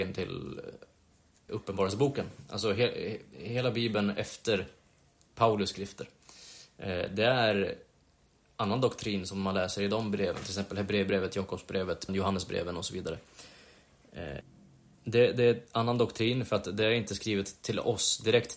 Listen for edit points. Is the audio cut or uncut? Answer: cut